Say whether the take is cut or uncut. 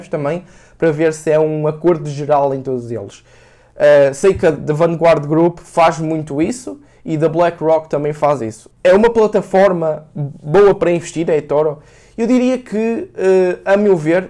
cut